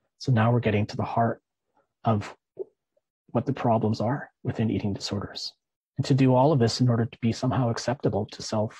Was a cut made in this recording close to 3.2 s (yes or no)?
no